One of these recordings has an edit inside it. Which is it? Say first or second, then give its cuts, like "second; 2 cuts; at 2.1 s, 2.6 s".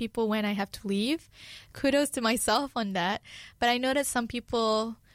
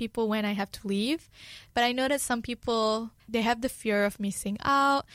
second; 2 cuts; at 1.7 s, 3.2 s